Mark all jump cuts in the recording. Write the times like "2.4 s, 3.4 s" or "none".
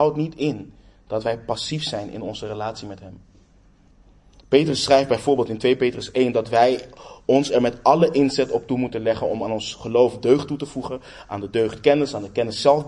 none